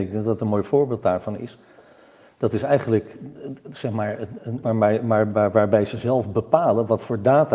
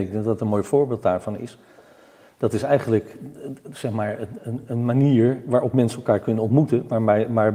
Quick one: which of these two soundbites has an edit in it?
first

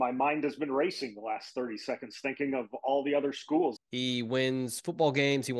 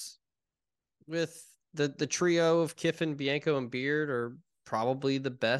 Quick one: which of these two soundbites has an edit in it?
first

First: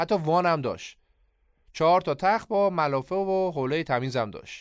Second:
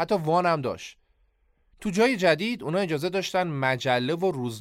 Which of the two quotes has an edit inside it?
second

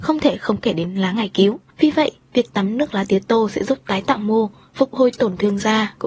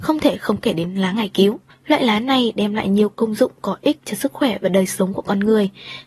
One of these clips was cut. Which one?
first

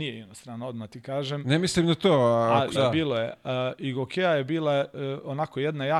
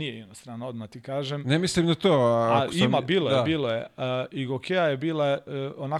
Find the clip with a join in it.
first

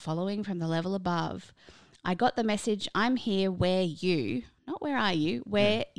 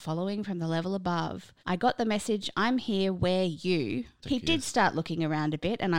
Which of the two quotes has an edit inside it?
second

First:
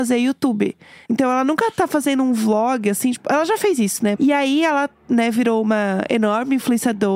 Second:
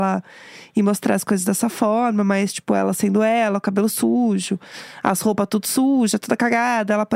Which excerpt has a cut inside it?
first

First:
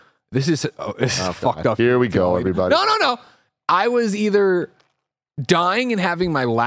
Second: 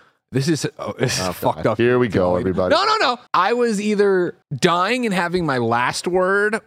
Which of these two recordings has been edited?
second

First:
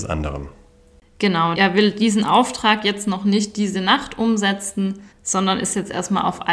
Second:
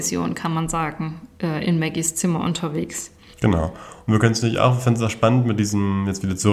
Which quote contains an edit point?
first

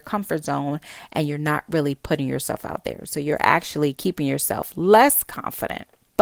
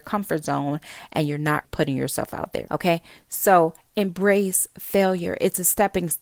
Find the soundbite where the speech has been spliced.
second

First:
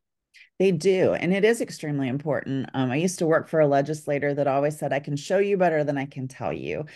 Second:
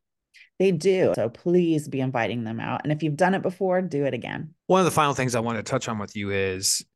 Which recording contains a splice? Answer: second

